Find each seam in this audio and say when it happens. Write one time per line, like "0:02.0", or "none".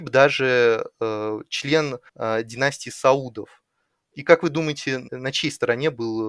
0:02.1